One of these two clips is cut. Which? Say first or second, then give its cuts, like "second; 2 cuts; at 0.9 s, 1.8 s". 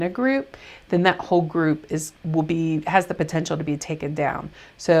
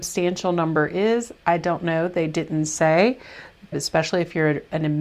second; 1 cut; at 3.7 s